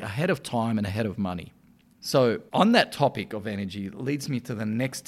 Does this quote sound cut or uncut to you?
uncut